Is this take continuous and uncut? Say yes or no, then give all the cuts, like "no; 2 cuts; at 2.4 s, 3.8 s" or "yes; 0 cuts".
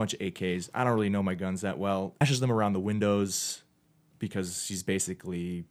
no; 1 cut; at 2.2 s